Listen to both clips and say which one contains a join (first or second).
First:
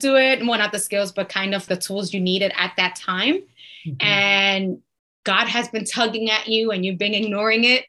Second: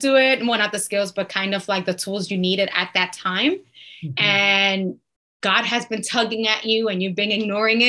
first